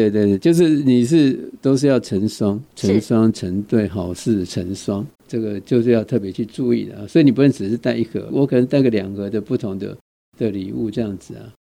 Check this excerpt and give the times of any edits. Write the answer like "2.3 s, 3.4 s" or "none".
5.1 s